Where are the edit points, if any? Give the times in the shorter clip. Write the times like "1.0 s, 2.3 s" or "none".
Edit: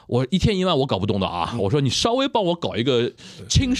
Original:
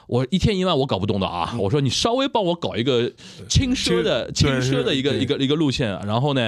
none

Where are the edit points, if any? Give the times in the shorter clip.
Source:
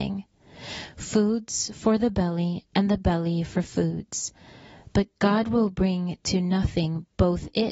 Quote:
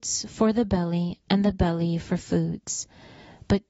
none

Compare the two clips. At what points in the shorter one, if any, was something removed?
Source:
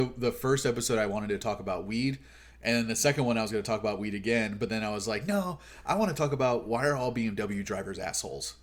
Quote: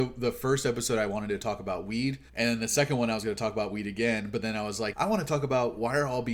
2.3 s, 4.9 s

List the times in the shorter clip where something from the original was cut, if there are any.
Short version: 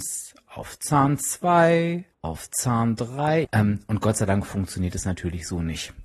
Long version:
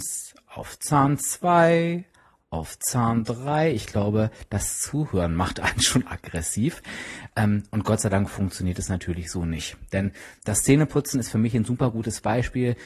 2.1 s, 3.4 s

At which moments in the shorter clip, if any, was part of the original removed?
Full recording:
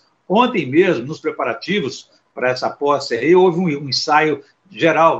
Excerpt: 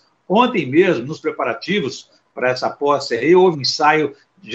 3.5 s

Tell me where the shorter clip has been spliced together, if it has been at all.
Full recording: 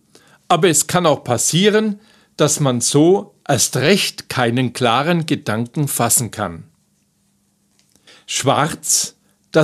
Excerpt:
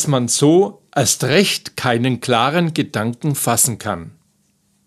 none

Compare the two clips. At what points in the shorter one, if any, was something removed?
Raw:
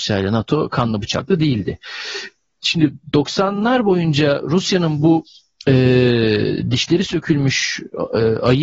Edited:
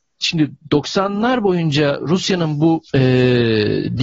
2.9 s

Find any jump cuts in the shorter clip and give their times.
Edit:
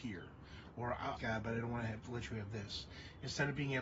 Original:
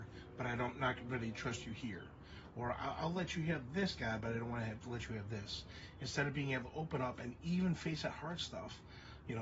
1.2 s

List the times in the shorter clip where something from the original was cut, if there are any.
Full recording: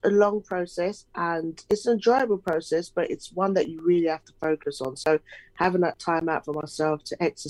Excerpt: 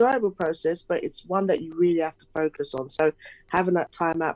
none

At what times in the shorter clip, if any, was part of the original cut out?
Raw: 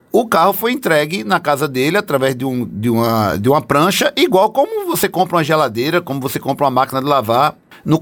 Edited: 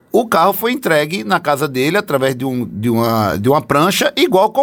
none

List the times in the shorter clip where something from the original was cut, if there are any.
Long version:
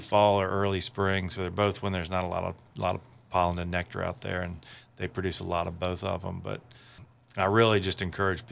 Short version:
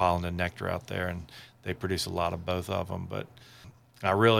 none

